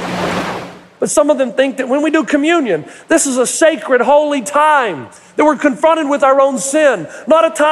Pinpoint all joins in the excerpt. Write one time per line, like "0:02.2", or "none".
0:00.9